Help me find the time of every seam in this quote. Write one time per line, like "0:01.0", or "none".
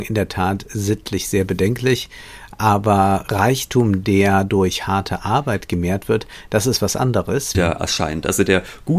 0:07.5

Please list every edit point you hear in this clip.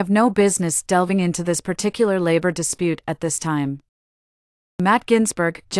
0:04.6

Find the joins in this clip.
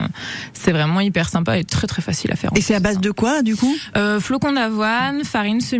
none

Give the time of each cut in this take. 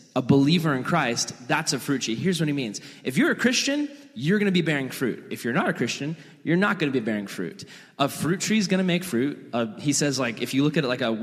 none

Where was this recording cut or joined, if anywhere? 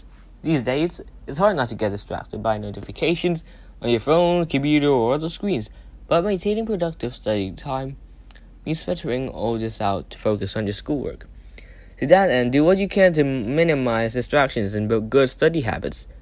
none

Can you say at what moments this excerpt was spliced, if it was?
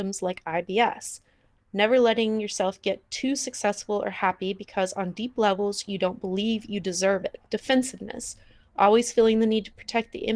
0:01.6
0:07.5

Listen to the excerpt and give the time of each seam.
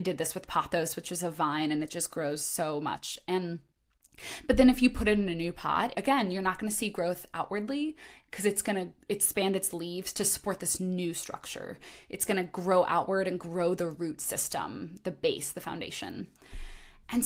0:05.9

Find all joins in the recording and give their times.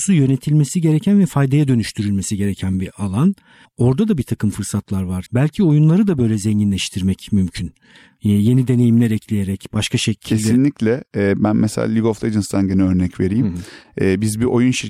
0:05.3

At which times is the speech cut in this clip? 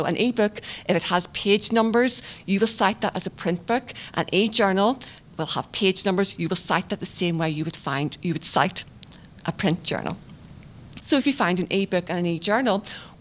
0:11.0

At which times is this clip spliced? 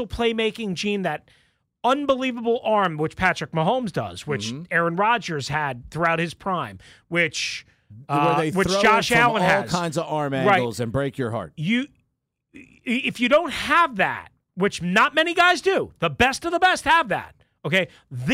none

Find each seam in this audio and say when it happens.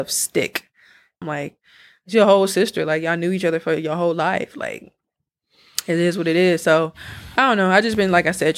0:01.2

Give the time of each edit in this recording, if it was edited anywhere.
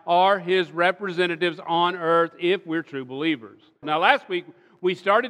0:03.8

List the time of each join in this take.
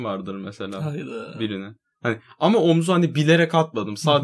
none

